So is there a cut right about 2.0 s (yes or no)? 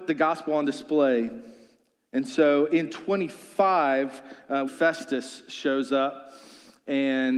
no